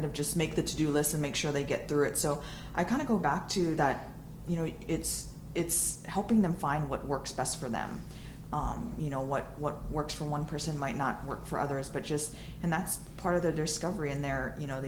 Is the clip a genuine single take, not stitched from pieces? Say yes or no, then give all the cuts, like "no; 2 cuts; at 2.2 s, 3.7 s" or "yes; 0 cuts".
yes; 0 cuts